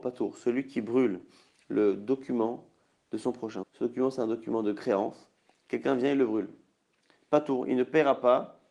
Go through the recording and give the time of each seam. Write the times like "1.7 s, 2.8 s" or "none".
3.6 s

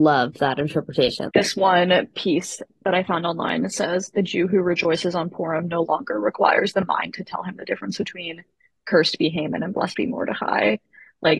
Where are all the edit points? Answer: 1.3 s

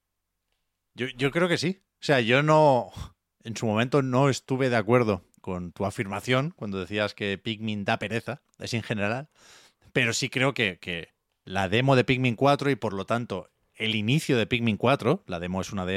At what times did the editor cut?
5.4 s

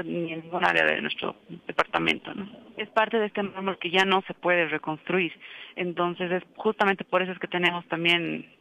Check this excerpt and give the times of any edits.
2.8 s

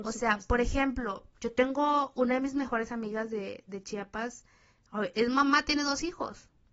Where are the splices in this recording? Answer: none

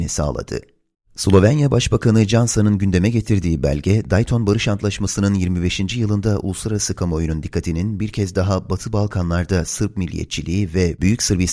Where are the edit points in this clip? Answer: 0.9 s

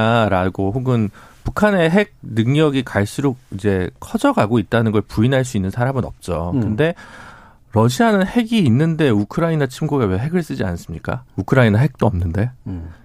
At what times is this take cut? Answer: 11.3 s

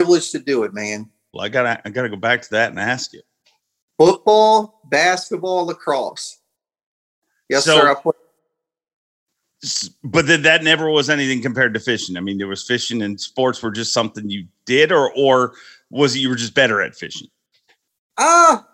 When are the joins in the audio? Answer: 1.3 s

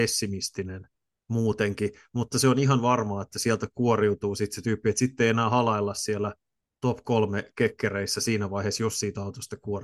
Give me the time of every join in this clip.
none

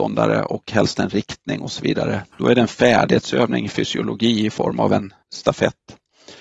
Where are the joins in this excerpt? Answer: 2.3 s, 5.2 s

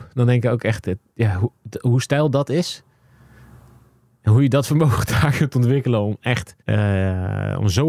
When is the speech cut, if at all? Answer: 6.6 s

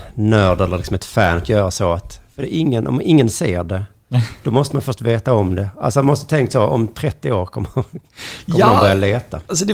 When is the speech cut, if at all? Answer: none

